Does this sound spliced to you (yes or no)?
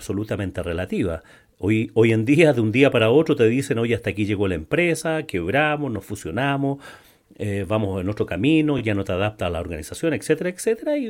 no